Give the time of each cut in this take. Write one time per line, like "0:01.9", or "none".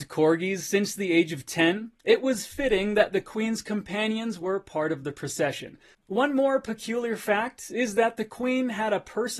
0:05.9